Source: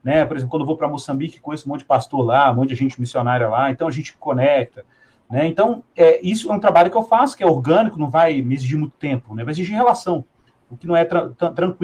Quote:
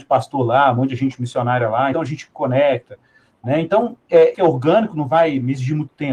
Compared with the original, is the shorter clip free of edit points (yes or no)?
no